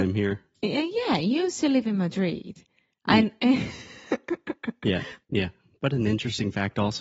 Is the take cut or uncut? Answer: cut